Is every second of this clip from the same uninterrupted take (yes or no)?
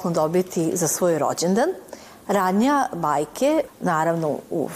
no